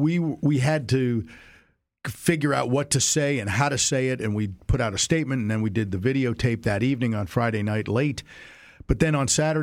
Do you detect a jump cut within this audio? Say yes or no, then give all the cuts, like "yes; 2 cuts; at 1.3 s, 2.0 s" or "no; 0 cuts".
no; 0 cuts